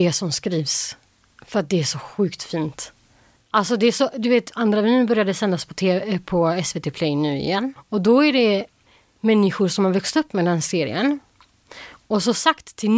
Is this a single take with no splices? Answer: yes; 0 cuts

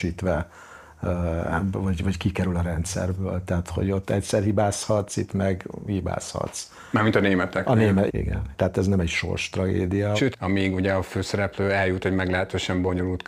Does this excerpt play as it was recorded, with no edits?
no; 2 cuts; at 8.1 s, 10.3 s

